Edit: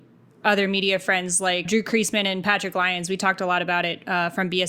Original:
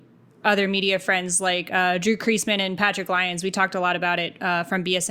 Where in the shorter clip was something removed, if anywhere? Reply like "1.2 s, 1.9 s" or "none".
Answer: 1.7 s